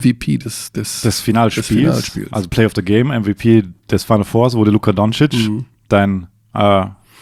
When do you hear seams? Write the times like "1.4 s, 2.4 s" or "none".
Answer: none